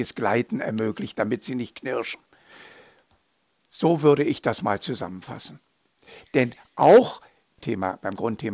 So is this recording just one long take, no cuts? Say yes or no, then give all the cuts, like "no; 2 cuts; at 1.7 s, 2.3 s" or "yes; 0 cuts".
no; 1 cut; at 7.6 s